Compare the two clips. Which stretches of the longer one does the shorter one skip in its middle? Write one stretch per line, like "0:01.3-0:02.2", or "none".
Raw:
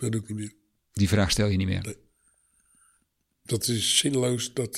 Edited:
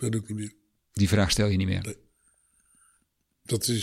none